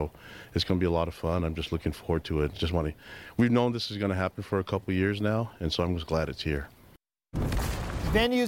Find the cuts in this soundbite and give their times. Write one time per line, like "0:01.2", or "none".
none